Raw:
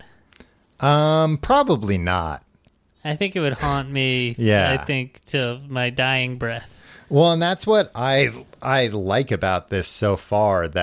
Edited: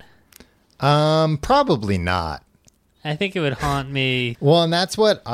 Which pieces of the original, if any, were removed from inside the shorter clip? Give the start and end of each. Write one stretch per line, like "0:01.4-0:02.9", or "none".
0:04.4-0:07.0